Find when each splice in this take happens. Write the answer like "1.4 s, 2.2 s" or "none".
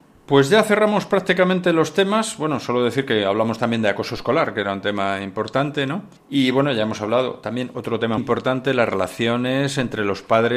6.2 s, 8.2 s